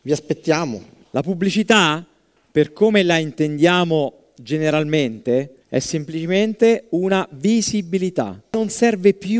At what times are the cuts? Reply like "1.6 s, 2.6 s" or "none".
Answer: 1.0 s, 5.6 s